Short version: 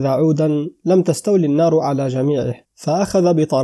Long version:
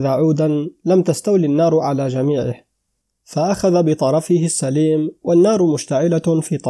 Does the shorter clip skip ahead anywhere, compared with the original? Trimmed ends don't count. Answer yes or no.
yes